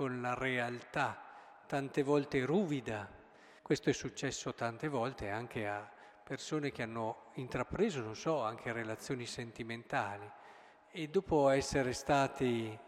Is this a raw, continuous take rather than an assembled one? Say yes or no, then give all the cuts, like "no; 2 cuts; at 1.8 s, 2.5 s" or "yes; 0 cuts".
no; 1 cut; at 3.6 s